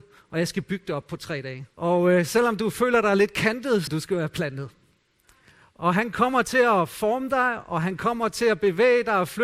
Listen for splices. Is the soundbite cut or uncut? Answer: cut